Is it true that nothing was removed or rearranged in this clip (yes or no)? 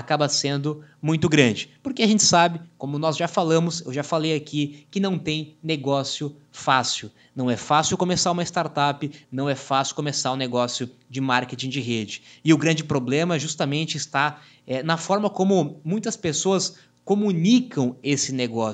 no